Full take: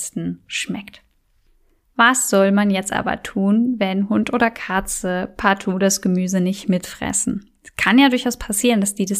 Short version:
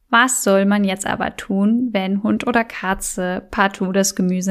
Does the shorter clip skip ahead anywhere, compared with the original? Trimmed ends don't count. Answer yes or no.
no